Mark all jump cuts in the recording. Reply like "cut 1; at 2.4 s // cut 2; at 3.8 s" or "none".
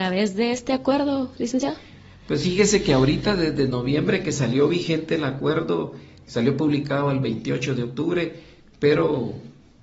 cut 1; at 6.2 s